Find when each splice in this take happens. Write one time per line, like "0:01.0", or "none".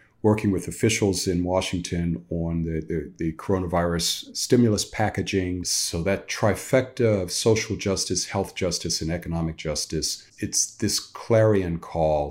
0:05.6
0:10.3

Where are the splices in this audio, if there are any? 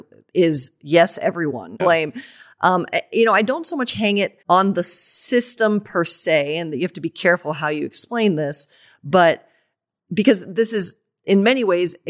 0:01.8
0:04.4

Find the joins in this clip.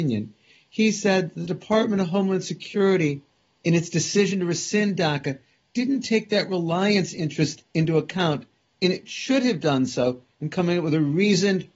none

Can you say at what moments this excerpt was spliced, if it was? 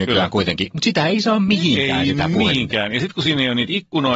none

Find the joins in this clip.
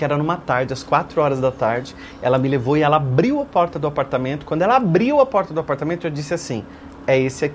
none

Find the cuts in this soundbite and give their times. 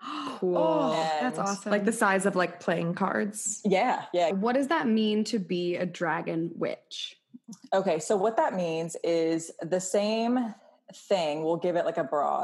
0:04.3

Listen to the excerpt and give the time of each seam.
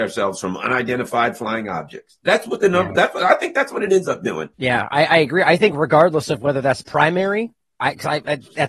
0:04.5

